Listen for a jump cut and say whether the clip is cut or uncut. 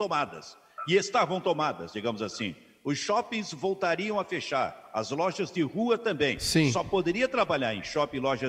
uncut